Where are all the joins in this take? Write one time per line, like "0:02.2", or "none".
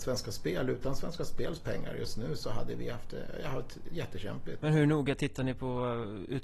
0:04.6